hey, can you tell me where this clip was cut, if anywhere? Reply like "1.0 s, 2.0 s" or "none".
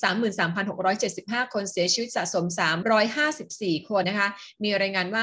4.0 s